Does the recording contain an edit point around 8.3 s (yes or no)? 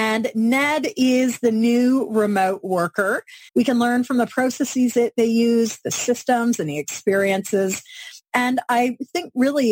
no